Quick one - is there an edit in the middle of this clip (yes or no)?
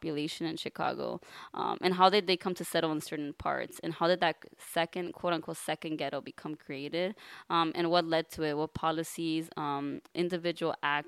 no